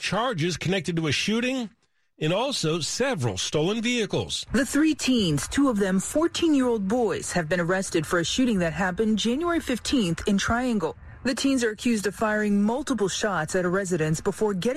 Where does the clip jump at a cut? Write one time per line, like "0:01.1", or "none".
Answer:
none